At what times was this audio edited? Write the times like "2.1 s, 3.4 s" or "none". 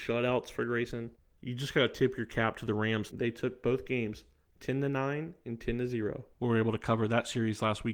3.1 s, 6.3 s